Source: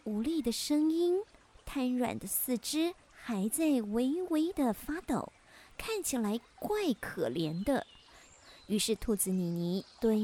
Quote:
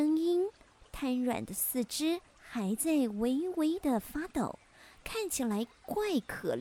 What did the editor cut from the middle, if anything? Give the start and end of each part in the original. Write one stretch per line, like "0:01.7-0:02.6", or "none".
none

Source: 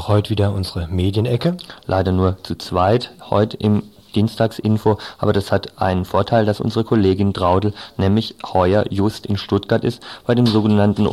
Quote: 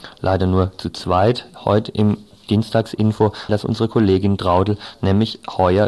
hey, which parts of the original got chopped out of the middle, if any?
0:05.1-0:06.4

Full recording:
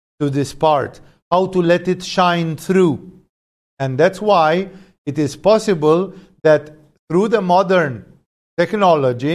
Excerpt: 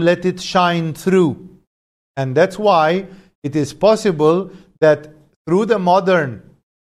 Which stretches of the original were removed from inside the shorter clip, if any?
none

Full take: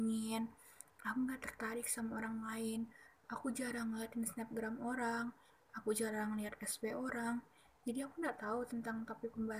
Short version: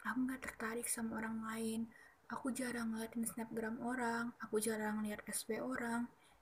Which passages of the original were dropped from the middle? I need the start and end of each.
0:05.4-0:05.7

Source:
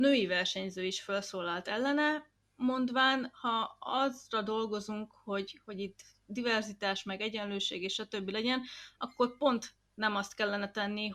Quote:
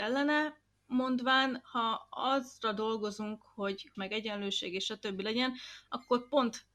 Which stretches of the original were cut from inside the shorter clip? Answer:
0:05.6-0:07.0

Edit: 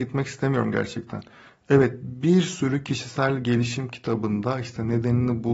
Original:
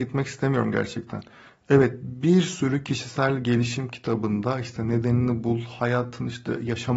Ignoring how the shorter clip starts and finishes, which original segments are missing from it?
none

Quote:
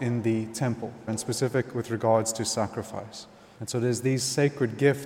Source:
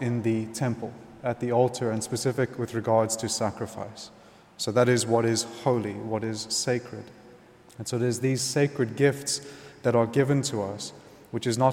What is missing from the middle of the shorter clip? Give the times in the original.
0:01.1-0:01.9
0:04.4-0:07.7

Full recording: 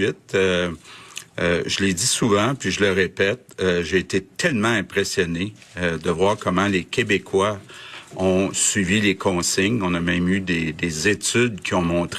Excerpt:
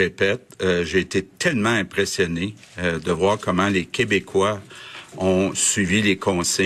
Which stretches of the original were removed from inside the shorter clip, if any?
none

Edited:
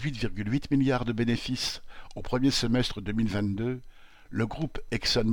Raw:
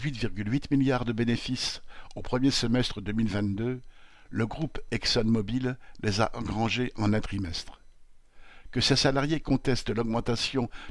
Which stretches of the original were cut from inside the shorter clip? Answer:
none

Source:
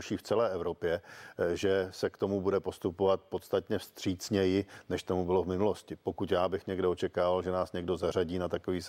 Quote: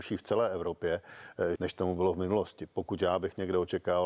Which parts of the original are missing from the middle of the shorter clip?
0:01.6-0:04.8

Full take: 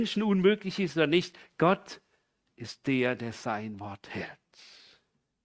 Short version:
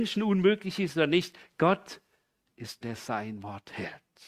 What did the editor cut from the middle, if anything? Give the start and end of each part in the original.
0:02.8-0:03.2

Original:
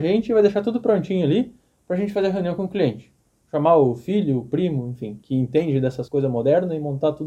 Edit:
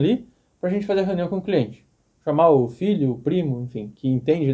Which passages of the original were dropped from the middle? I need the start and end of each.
none

